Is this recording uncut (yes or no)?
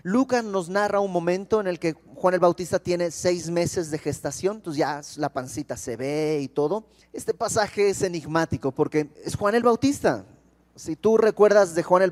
no